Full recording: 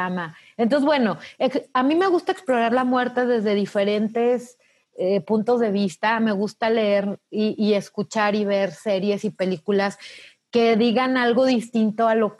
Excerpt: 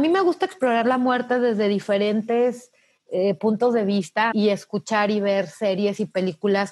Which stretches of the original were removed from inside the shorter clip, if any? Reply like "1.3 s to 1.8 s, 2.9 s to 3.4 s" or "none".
6.2 s to 7.6 s